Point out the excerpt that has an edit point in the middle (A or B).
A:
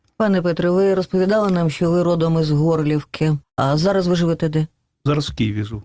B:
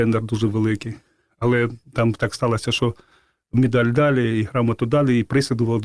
A